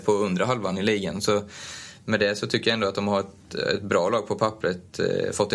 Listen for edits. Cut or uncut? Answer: uncut